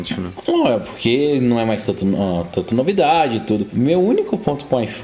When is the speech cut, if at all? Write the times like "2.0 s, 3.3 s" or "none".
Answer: none